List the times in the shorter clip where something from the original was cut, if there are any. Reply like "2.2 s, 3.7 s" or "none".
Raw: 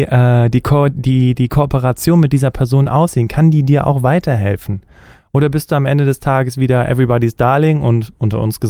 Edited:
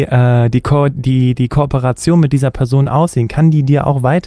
none